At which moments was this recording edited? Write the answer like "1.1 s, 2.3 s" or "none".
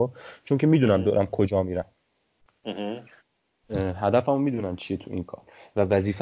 none